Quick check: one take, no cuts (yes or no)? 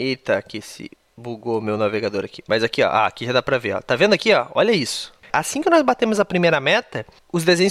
no